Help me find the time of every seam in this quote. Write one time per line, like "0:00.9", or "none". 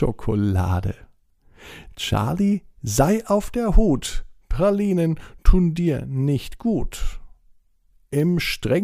none